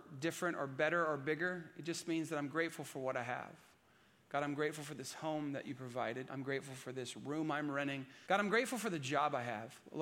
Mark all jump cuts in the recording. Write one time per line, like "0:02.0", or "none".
0:06.3
0:08.3